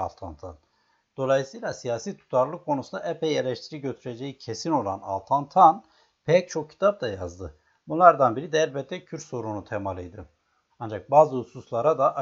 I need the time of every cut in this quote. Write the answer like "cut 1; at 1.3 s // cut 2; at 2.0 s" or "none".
cut 1; at 10.7 s